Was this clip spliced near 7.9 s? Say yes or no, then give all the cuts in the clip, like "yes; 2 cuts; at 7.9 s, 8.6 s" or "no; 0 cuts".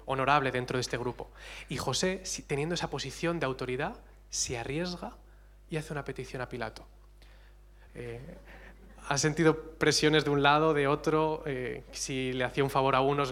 yes; 1 cut; at 7.9 s